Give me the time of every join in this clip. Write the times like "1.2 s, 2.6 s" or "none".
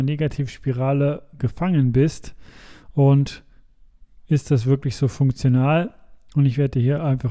none